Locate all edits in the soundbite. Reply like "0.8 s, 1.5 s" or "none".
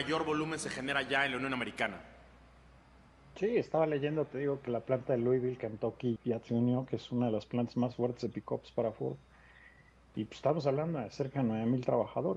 6.2 s

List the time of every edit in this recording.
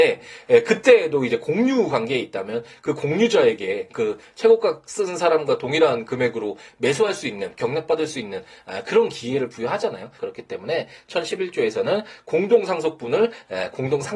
10.2 s

